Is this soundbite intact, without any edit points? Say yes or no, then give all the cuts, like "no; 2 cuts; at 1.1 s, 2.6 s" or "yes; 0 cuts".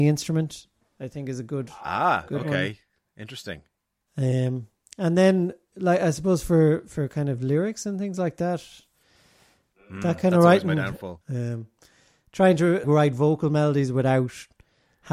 no; 2 cuts; at 11.2 s, 12.8 s